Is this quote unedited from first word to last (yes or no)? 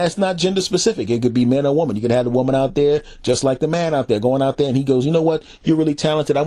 yes